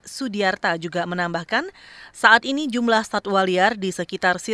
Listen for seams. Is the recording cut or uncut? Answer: uncut